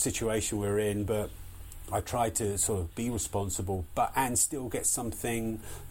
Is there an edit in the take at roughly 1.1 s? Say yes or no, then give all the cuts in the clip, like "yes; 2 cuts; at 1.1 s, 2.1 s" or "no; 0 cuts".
no; 0 cuts